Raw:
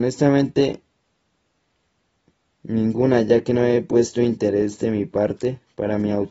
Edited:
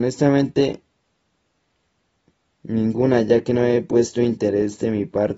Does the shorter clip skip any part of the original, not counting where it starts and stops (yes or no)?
no